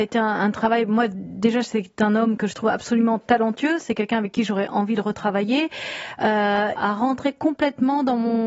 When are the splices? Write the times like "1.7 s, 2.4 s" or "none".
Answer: 6.8 s